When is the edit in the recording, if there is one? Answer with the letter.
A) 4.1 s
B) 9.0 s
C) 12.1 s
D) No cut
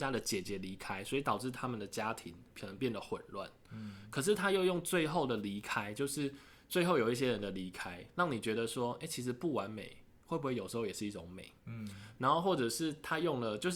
D